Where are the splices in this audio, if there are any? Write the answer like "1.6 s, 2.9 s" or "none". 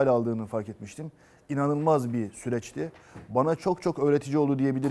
none